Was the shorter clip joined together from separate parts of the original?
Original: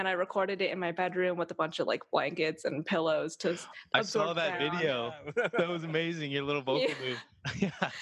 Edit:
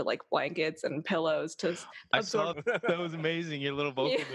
yes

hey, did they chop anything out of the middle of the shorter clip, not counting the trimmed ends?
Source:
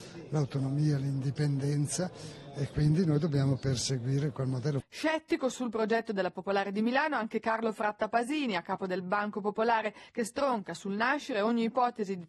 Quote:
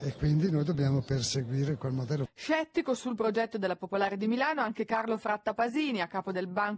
no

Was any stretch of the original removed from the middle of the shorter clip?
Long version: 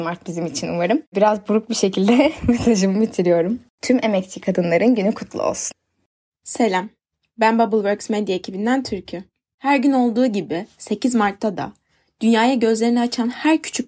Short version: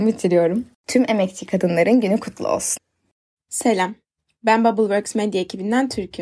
no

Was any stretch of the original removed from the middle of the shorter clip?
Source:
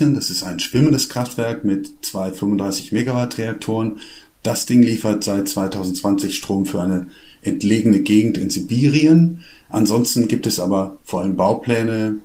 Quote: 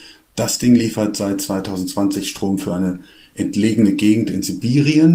no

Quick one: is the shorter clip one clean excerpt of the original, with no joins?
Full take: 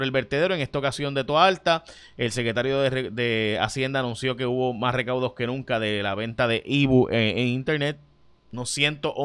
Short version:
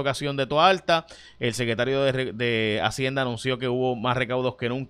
yes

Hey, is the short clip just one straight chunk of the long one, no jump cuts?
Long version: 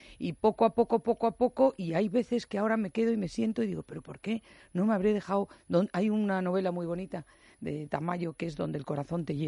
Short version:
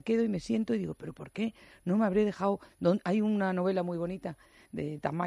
yes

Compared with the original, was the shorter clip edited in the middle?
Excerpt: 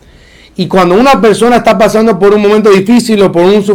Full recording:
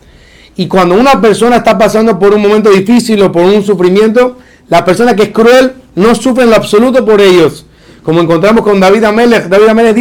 no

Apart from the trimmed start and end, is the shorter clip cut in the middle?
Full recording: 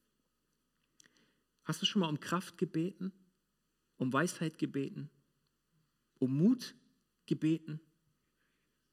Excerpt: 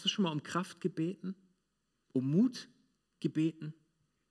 yes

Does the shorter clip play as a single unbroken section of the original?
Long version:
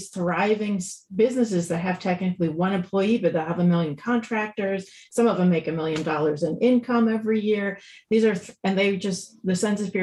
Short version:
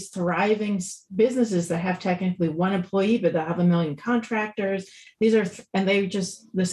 no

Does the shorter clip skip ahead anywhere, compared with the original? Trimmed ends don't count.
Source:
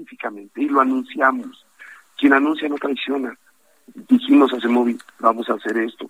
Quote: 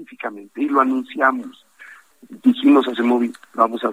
yes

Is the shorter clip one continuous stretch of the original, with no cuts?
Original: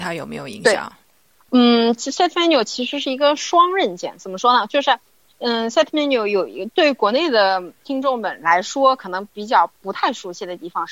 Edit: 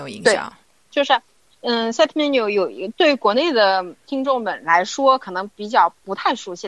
no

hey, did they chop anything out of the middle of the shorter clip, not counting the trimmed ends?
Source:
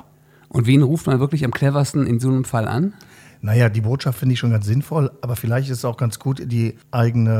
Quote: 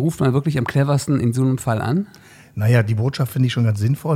no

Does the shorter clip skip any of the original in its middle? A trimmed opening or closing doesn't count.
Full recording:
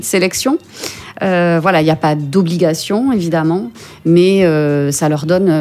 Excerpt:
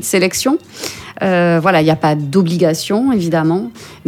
no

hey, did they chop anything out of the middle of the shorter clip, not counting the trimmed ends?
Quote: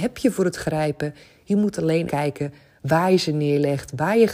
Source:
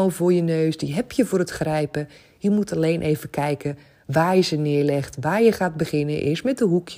yes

